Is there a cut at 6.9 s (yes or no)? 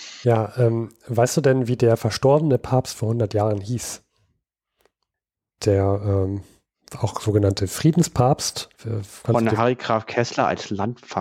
no